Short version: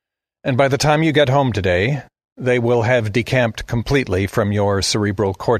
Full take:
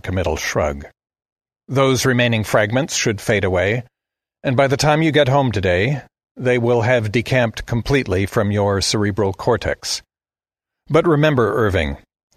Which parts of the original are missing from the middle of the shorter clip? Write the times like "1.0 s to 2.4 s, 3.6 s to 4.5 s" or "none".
none

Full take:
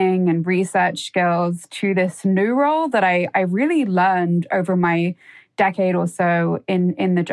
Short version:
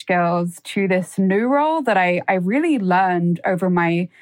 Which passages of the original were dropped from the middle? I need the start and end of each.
none

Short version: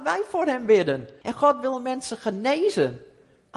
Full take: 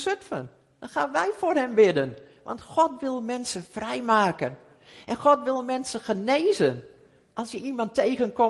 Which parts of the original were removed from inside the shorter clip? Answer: 2.3 s to 5.0 s

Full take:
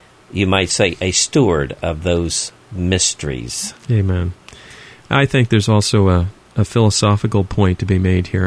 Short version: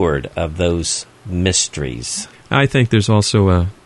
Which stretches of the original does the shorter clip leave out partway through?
3.8 s to 4.9 s

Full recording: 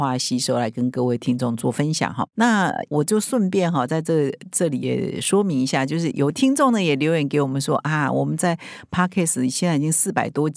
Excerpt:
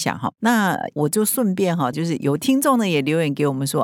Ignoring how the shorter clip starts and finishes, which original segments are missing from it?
3.9 s to 5.9 s

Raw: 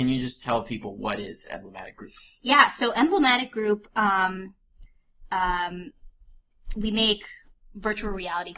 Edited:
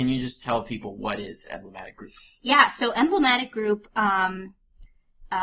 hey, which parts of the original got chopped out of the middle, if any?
none

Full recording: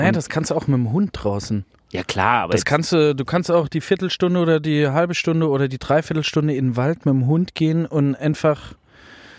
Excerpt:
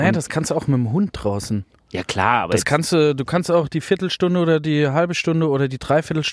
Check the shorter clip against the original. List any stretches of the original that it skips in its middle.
none

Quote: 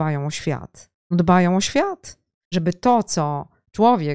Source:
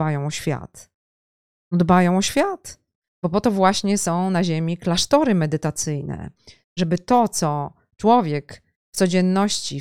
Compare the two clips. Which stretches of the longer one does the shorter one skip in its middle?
1.0 s to 1.6 s, 3.1 s to 6.7 s

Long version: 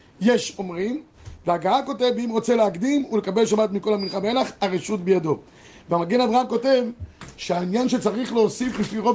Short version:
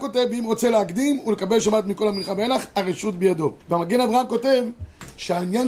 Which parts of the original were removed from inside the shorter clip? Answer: 5.5 s to 5.8 s

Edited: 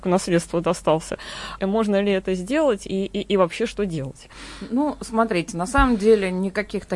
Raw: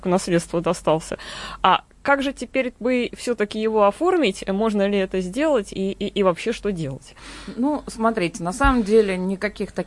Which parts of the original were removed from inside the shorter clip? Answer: 1.6 s to 4.4 s

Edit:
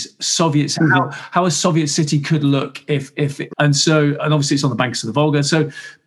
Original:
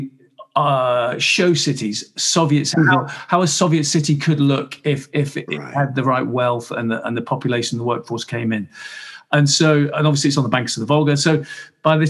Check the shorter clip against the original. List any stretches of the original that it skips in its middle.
5.5 s to 9.3 s

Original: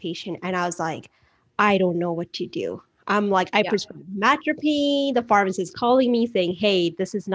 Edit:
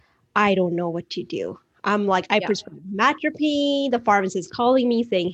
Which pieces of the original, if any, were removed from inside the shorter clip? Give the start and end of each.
none

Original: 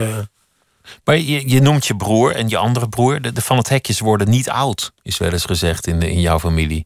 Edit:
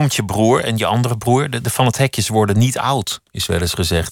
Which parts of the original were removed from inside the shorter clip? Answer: none

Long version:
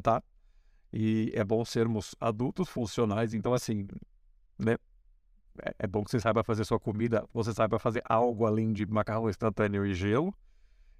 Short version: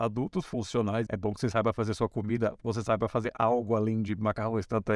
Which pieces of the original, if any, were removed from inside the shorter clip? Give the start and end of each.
3.3 s to 5.8 s

